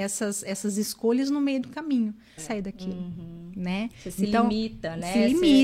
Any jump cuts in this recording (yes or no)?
yes